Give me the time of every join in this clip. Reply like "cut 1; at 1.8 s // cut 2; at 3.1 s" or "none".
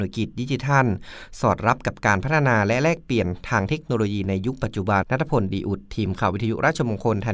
cut 1; at 5.0 s